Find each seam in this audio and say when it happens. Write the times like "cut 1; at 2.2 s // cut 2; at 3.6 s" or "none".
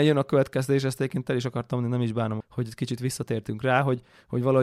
cut 1; at 2.4 s